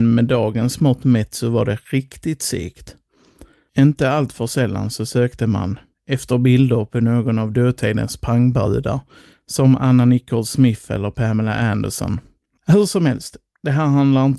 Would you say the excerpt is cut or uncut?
cut